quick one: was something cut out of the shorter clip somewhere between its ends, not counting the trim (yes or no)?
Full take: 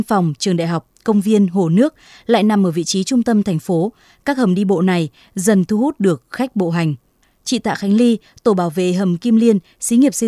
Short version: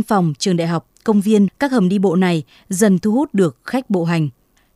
yes